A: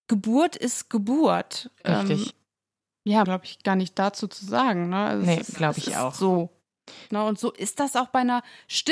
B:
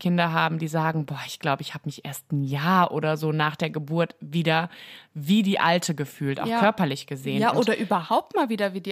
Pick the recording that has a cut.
A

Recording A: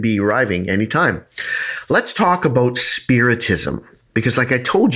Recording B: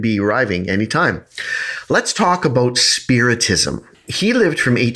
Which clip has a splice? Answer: B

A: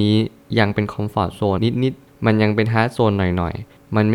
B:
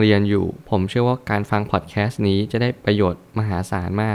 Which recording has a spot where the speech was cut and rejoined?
A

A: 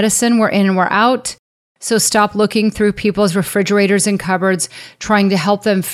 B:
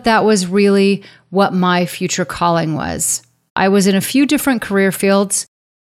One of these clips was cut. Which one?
B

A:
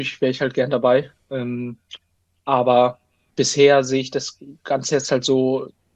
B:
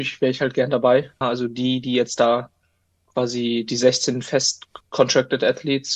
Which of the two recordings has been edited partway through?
B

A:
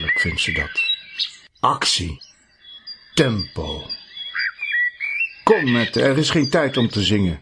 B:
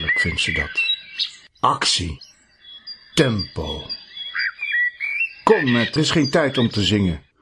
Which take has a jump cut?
B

